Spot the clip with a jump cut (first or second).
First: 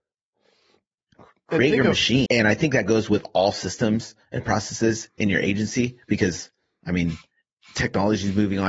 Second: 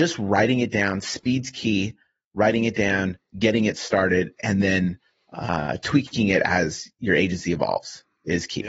first